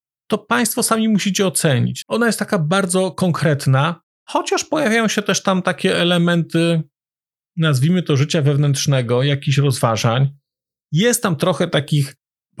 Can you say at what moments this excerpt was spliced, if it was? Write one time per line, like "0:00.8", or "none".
0:02.0